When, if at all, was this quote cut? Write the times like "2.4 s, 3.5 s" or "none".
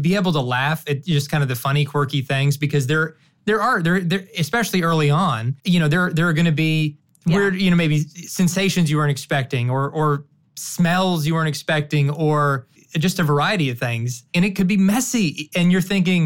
5.6 s

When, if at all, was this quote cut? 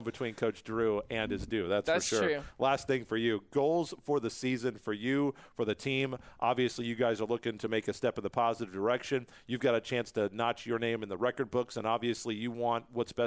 none

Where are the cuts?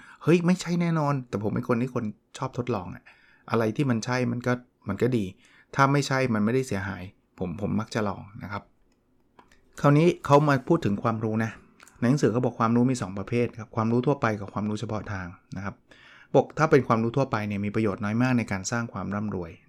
none

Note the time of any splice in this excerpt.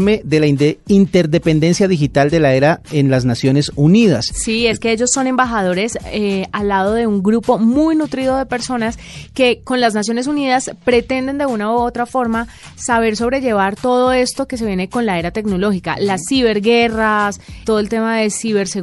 17.6 s

